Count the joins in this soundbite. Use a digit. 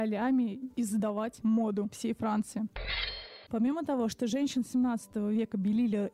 1